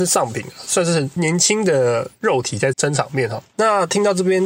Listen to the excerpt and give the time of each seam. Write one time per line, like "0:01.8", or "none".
0:02.7